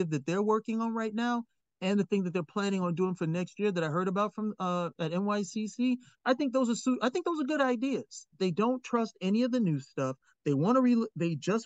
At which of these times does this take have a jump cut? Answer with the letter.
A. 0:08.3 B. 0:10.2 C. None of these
A